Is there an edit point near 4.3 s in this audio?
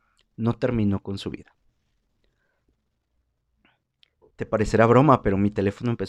no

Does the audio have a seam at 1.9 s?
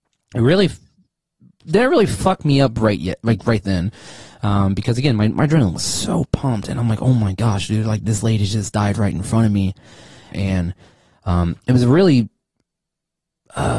no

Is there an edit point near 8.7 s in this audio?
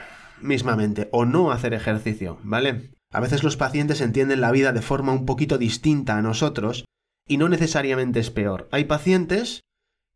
no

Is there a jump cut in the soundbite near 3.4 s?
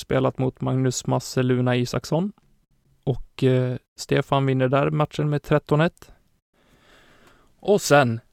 no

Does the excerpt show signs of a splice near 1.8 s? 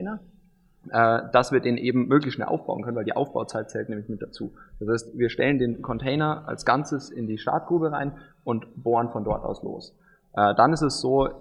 no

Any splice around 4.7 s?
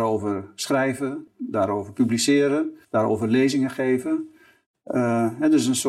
no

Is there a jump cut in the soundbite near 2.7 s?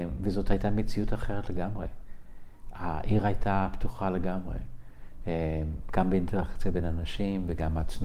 no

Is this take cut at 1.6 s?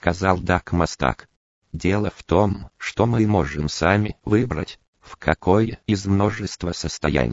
yes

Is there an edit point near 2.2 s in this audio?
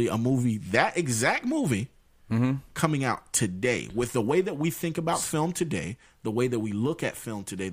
no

